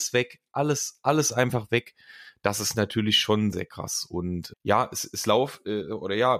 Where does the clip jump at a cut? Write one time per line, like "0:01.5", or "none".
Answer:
0:03.5
0:04.5